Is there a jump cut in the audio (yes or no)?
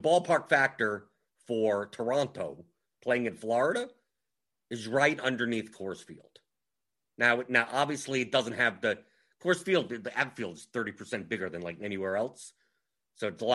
no